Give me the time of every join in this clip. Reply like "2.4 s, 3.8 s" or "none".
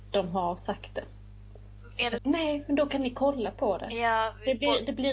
2.2 s

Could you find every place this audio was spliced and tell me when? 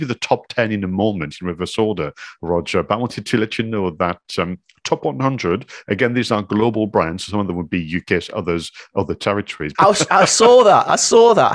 9.7 s

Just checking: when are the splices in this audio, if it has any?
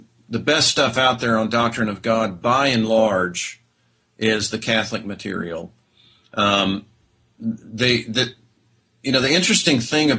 none

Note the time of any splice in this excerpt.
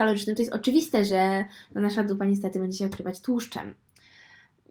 none

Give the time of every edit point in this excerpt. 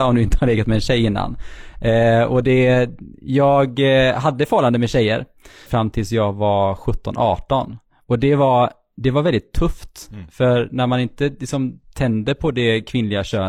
5.7 s

